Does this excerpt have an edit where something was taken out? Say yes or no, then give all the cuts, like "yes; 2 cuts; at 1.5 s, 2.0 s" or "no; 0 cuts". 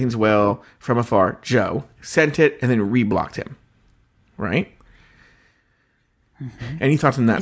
no; 0 cuts